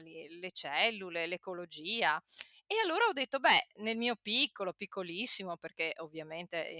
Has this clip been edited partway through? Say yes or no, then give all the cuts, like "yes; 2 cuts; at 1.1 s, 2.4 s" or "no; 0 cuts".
no; 0 cuts